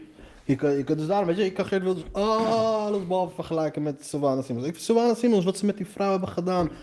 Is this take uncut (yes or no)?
yes